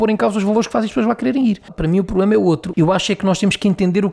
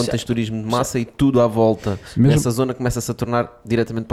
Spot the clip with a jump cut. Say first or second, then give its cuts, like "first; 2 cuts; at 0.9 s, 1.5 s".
first; 2 cuts; at 1.7 s, 2.7 s